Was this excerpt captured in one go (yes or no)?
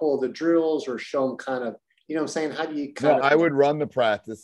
no